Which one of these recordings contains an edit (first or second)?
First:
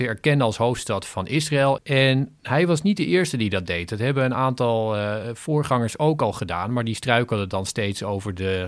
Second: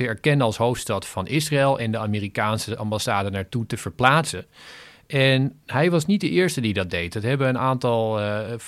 first